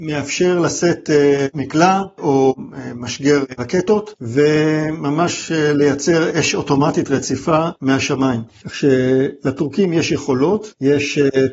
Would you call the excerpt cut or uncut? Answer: uncut